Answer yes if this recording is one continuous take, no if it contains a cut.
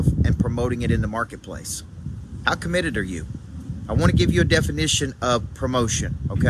yes